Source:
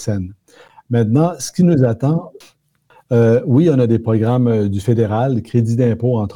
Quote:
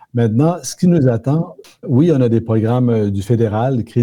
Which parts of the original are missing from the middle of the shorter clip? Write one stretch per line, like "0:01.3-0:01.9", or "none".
0:02.6-0:03.4